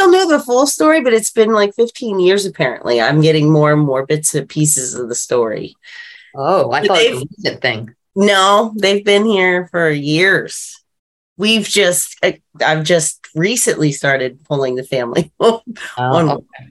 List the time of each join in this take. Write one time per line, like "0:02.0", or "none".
none